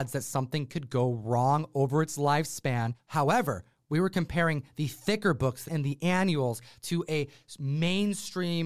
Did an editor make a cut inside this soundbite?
yes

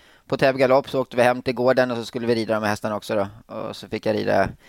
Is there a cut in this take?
no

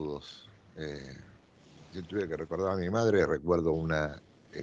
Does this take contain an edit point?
no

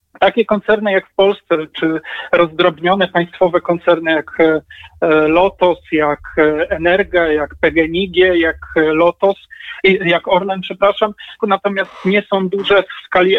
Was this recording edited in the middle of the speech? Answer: yes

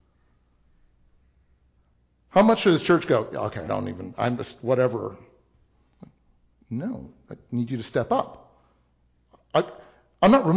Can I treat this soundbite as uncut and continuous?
no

